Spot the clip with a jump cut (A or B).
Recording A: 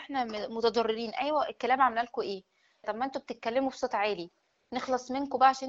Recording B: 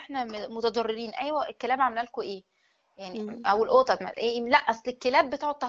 A